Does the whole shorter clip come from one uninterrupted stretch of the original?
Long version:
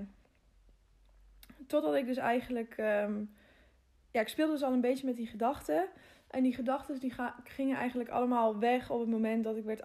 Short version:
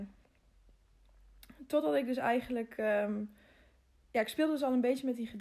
yes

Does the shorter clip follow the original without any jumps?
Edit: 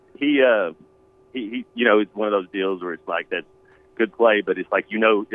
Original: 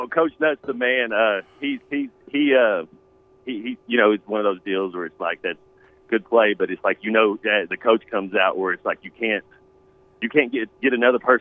yes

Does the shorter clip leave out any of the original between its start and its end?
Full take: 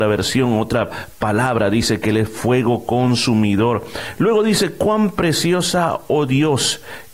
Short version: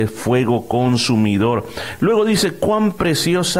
no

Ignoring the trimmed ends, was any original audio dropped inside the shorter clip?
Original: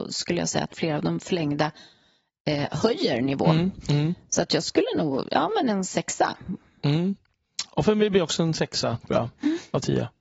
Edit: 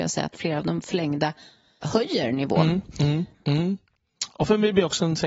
yes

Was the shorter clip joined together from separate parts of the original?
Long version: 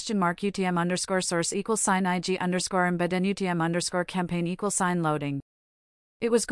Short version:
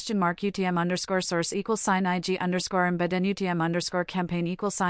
no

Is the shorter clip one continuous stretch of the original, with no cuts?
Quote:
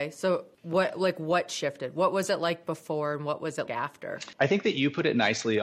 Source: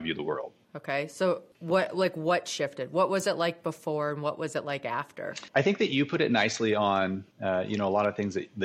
no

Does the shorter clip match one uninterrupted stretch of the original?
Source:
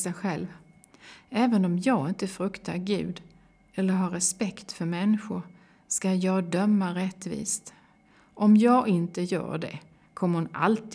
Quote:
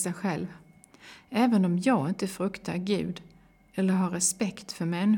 yes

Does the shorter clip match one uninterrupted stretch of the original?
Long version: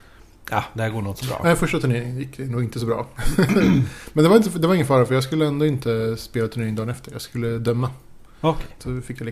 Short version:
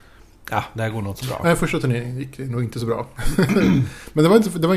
yes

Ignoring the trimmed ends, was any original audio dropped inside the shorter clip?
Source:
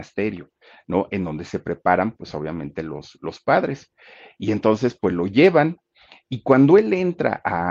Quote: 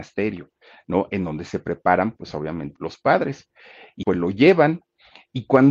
yes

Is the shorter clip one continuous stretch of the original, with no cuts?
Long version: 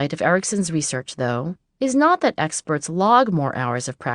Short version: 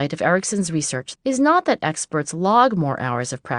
no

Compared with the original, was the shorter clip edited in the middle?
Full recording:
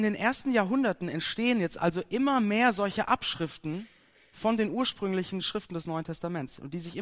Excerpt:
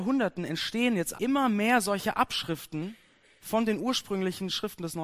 yes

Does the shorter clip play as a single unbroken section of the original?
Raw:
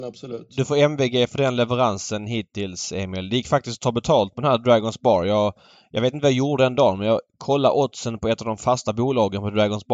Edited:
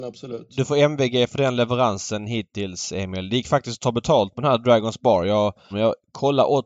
no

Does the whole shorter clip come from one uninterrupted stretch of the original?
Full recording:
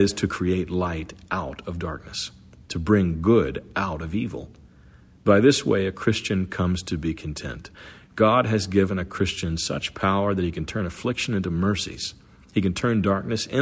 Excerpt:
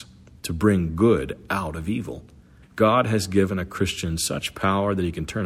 no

